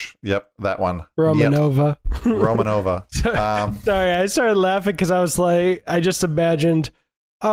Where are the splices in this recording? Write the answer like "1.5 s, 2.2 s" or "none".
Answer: none